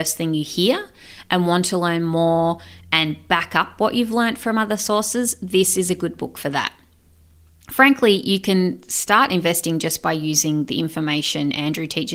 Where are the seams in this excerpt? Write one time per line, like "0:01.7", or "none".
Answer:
none